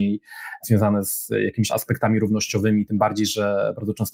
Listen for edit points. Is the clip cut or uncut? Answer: cut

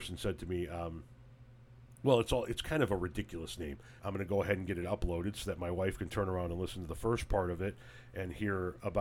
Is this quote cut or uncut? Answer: cut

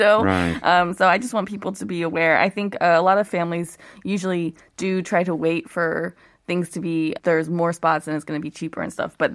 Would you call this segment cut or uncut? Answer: cut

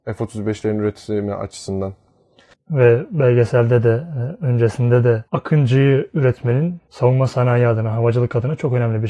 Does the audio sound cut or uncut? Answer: cut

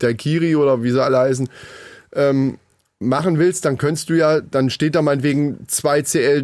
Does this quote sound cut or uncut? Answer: uncut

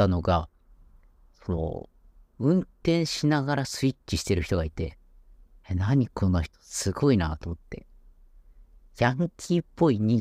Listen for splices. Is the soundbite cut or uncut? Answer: uncut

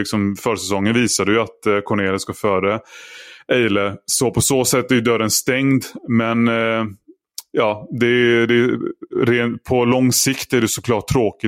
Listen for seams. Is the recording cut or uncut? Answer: uncut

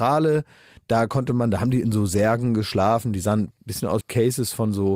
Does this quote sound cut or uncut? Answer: cut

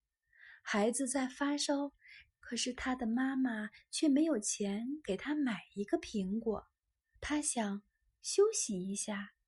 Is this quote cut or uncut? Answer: cut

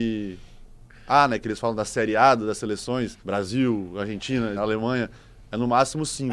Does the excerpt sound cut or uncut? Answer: cut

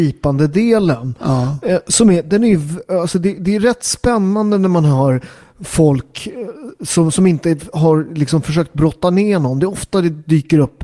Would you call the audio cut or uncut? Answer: uncut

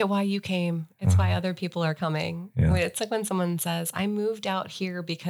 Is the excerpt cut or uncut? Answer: uncut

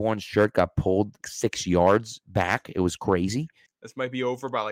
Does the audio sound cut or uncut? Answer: cut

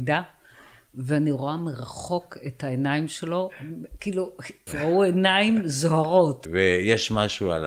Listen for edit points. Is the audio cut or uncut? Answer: cut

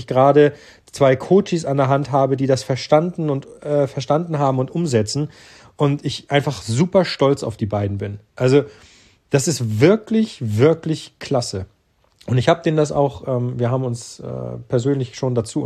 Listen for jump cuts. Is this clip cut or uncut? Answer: uncut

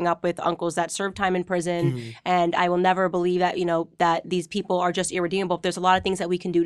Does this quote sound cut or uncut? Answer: uncut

